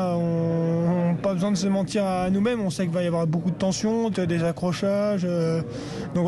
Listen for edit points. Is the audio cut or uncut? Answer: cut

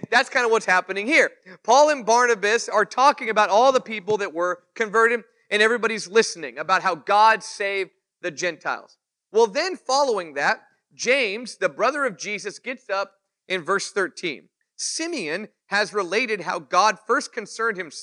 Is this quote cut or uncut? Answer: cut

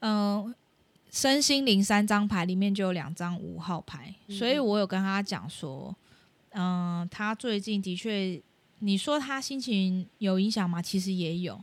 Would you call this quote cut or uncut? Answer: cut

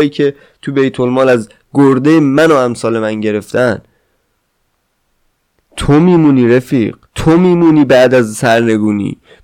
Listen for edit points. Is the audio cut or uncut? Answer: cut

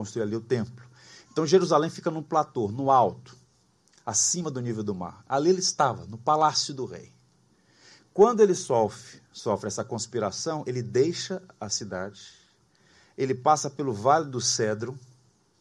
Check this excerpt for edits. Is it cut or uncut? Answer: uncut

